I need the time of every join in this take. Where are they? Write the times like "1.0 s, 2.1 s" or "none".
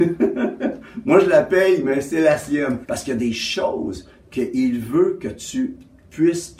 2.8 s